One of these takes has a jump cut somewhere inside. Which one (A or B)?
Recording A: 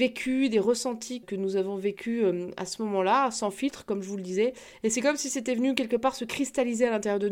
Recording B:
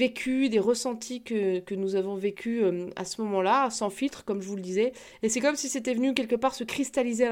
A